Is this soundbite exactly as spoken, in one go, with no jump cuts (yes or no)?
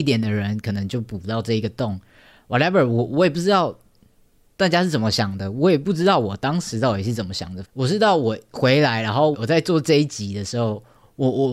no